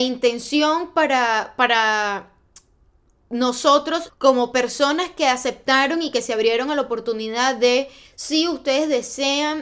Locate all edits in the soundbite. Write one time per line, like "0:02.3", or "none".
0:04.1
0:08.0